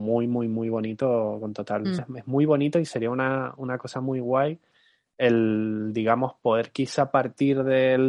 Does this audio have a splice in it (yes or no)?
yes